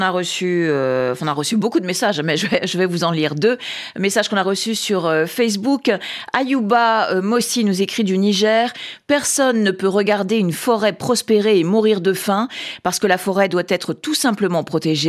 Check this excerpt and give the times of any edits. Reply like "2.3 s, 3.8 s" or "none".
none